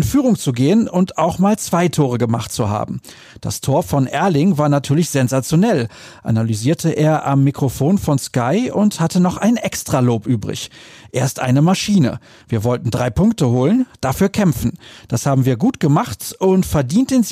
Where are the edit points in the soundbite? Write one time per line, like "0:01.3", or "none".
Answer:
0:12.4